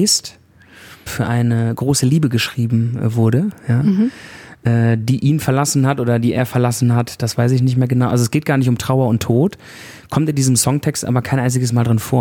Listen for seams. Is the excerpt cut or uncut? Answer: cut